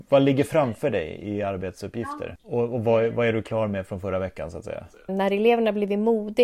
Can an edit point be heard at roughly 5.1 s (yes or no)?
yes